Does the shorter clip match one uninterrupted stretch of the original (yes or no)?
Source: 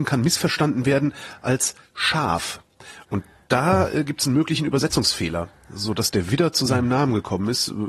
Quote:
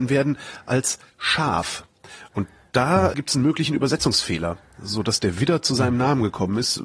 no